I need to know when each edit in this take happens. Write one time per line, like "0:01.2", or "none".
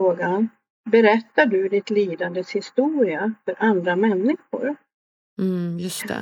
0:05.3